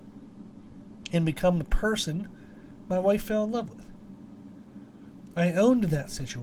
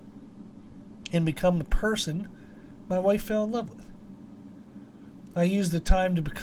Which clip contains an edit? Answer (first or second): first